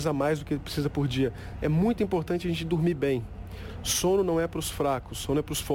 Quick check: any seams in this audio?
yes; 1 cut; at 1.6 s

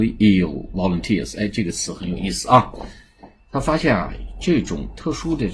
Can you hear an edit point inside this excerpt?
yes; 1 cut; at 3.4 s

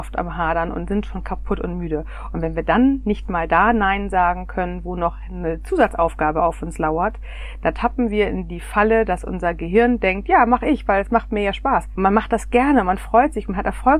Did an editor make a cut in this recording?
yes; 1 cut; at 11.9 s

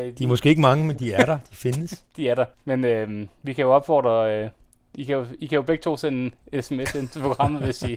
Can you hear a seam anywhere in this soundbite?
yes; 2 cuts; at 2.5 s, 6.4 s

